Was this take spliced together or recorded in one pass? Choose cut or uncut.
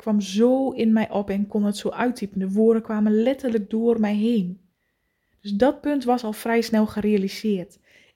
uncut